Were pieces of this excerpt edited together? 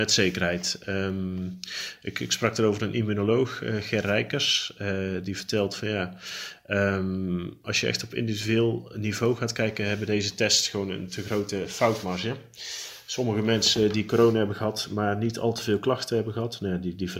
no; 0 cuts

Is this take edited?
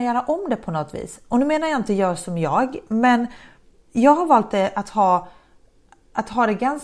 no; 0 cuts

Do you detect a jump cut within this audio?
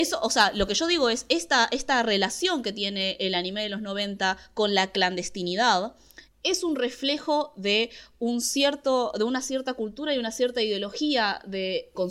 no; 0 cuts

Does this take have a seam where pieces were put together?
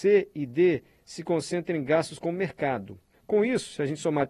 yes; 1 cut; at 3.1 s

